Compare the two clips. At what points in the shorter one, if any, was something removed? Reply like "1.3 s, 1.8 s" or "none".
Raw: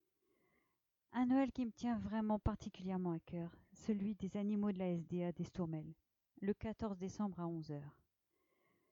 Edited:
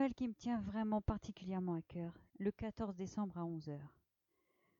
2.3 s